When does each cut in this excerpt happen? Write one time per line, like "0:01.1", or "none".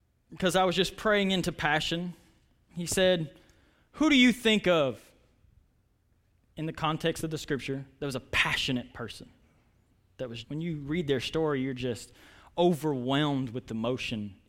0:10.4